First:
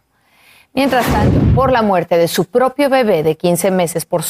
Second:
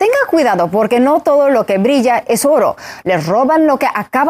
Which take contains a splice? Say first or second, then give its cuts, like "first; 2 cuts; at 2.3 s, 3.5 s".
second; 1 cut; at 3.0 s